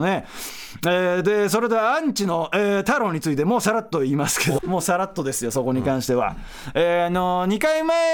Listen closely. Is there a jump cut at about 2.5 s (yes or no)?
no